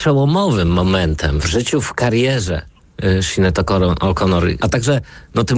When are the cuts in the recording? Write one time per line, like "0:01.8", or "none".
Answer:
0:01.4
0:04.6

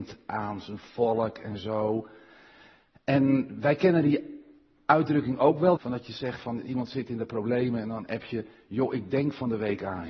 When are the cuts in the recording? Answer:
0:05.8

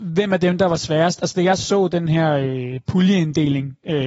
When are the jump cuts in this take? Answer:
none

